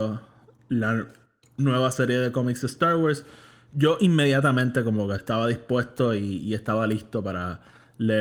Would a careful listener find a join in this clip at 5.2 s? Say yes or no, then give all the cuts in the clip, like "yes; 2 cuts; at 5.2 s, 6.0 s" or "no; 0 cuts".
yes; 1 cut; at 5.2 s